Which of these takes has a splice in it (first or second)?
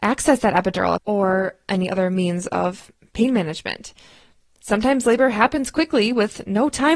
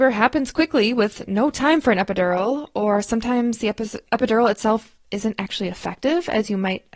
first